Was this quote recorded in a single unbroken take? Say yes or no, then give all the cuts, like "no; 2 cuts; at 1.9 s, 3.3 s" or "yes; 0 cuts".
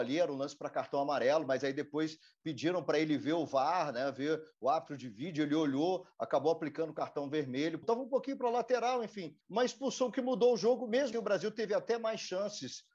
no; 3 cuts; at 7.8 s, 9.4 s, 11.1 s